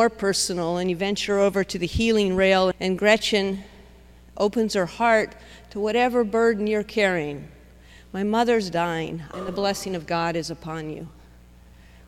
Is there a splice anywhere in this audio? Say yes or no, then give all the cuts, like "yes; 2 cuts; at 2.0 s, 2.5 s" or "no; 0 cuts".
yes; 2 cuts; at 2.7 s, 9.3 s